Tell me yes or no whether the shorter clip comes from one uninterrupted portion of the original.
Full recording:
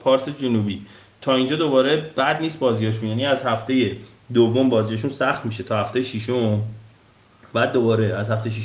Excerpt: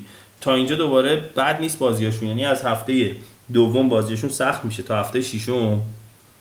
yes